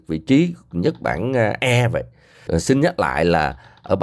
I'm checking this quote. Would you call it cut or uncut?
cut